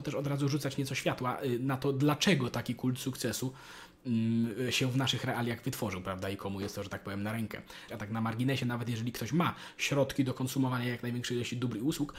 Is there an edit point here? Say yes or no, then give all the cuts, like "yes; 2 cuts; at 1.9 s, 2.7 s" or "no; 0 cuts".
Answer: yes; 1 cut; at 7.9 s